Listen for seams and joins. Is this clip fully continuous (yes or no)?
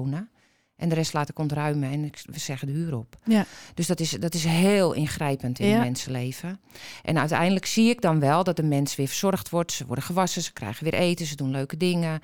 yes